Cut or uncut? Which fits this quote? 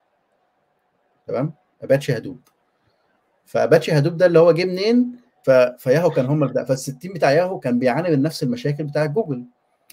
cut